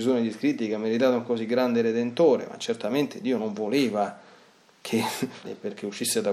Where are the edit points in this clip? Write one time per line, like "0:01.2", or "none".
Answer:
0:05.4